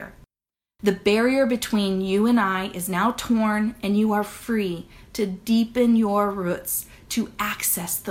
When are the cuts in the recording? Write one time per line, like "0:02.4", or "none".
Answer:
none